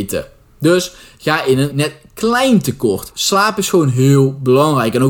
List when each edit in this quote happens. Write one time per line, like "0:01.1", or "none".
0:01.7
0:03.1